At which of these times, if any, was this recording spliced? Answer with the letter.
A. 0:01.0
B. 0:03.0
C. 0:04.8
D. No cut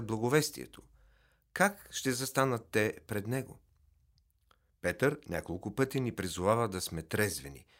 D